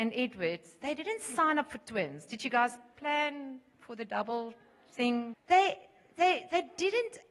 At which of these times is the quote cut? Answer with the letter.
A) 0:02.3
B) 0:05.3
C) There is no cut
B